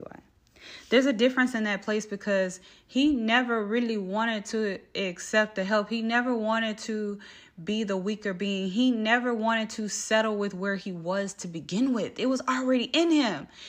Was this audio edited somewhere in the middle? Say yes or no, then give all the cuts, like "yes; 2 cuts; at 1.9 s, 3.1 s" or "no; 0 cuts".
no; 0 cuts